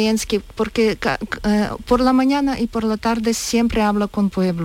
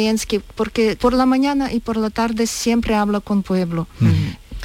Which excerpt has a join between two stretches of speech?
second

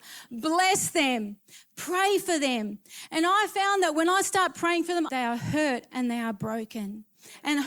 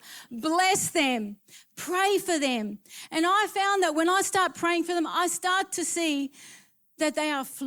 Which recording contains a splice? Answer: first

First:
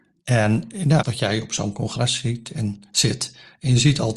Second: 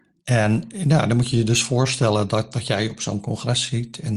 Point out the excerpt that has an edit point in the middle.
first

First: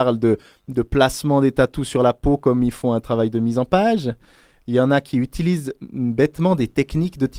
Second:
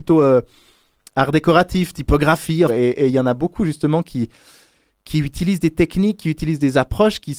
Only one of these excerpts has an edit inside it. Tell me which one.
second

